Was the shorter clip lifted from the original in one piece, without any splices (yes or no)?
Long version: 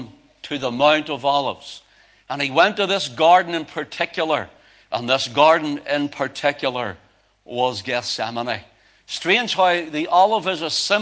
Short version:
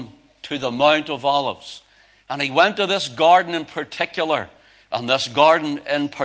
yes